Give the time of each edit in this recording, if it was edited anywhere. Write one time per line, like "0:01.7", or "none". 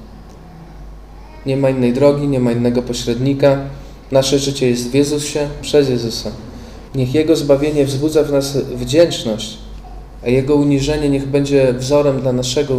0:05.6
0:06.9

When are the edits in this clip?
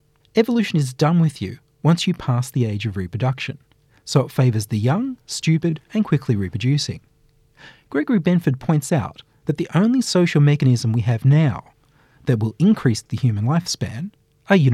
none

